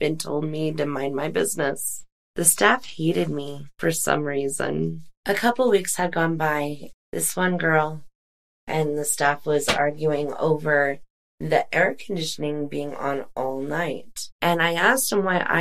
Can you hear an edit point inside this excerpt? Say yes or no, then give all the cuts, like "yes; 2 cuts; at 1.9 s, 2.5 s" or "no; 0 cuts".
yes; 2 cuts; at 6.9 s, 14.3 s